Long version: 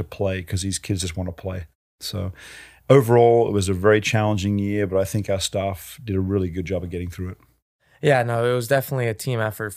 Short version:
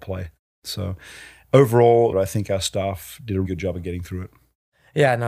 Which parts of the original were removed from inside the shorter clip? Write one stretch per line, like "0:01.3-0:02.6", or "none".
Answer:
0:03.5-0:04.9
0:06.2-0:06.5